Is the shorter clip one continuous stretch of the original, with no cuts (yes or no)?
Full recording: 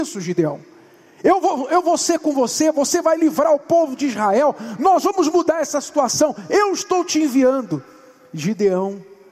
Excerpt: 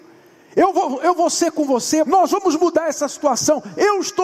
no